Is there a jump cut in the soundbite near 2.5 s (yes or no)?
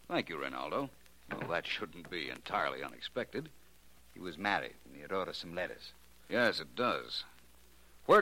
no